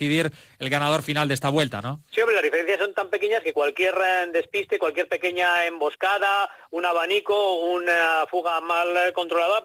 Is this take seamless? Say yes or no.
no